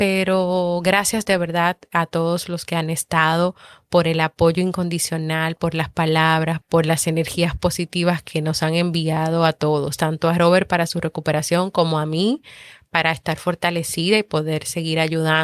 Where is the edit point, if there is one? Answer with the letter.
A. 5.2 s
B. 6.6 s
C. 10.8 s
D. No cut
B